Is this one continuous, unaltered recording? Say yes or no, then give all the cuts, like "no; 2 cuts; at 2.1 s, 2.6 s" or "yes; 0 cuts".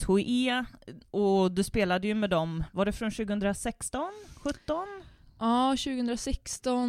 yes; 0 cuts